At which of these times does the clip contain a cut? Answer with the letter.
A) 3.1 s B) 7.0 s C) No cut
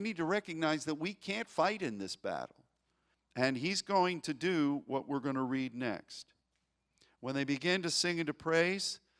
A